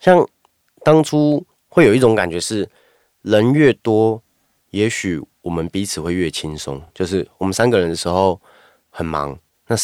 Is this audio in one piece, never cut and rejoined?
yes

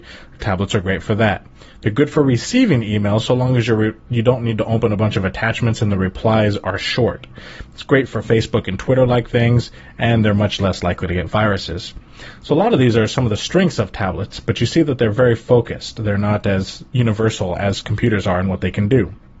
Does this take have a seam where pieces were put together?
no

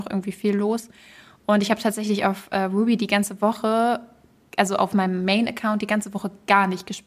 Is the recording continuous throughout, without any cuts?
yes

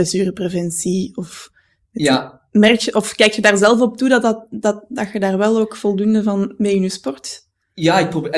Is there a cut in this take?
no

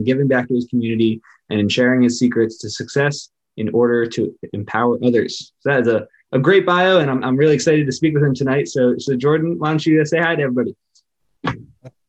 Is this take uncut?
yes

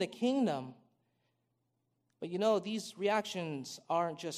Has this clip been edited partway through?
no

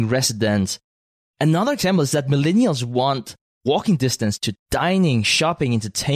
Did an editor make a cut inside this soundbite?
no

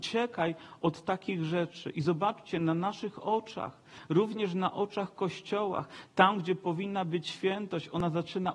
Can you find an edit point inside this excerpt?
no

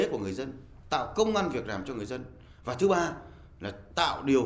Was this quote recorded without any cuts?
yes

